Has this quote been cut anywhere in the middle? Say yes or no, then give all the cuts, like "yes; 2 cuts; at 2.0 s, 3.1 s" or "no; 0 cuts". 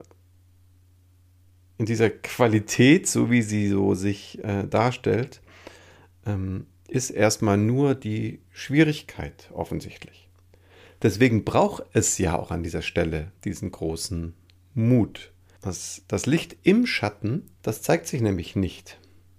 yes; 3 cuts; at 13.4 s, 15.6 s, 17.6 s